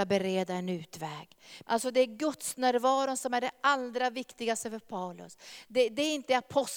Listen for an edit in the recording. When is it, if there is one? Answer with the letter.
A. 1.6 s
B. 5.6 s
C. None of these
A